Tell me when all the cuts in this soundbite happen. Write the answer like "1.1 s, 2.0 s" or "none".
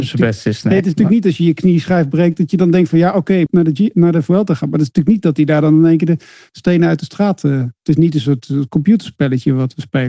3.5 s